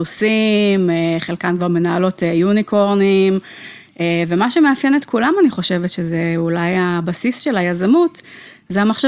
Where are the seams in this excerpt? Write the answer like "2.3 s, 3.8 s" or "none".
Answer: none